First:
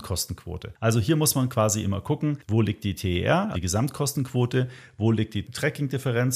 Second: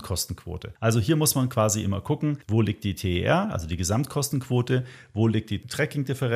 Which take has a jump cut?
first; 1 cut; at 3.5 s

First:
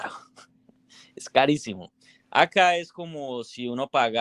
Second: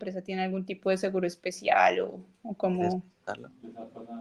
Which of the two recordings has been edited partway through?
first; 1 cut; at 2.2 s

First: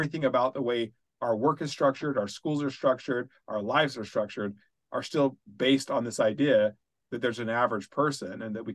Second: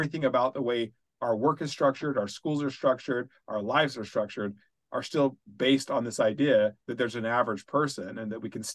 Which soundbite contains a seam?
second; 1 cut; at 6.8 s

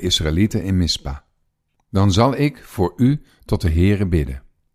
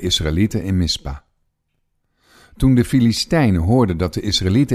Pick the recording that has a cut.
first; 1 cut; at 1.7 s

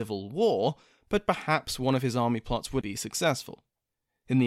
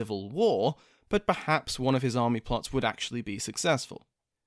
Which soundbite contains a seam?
first; 1 cut; at 2.8 s

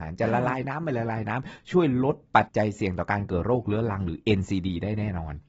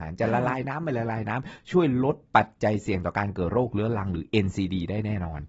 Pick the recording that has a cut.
first; 1 cut; at 2.5 s

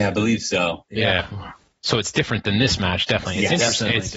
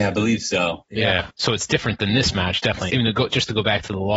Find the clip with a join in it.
second; 2 cuts; at 1.3 s, 2.9 s

